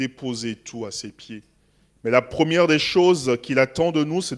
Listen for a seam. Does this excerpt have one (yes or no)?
yes